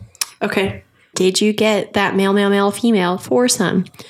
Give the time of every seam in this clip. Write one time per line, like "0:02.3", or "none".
0:01.1